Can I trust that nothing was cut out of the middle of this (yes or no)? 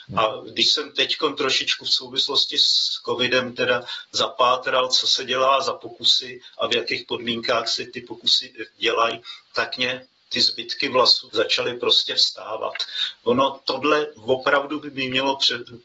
no